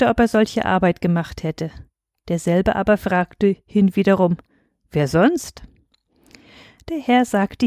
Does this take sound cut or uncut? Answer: uncut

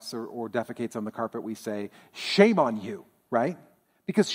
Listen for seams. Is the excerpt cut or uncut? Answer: uncut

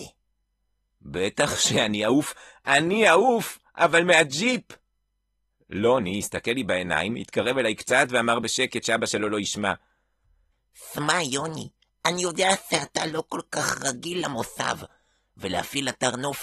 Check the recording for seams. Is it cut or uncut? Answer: uncut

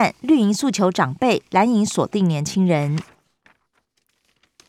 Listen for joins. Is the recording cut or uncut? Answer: uncut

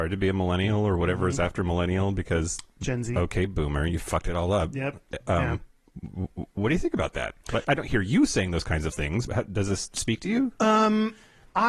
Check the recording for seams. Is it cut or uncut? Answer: cut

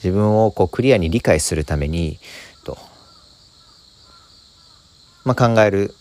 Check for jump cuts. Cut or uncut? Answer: cut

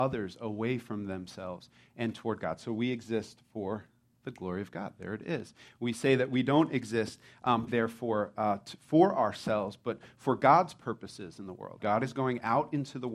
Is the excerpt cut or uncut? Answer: cut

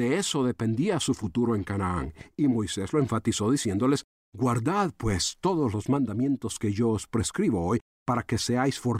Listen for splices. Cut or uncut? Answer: uncut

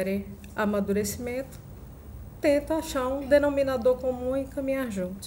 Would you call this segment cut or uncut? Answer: uncut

